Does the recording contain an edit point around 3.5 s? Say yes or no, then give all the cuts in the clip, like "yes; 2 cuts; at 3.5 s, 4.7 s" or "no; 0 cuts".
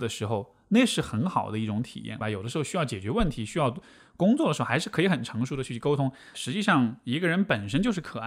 no; 2 cuts; at 2.2 s, 6.3 s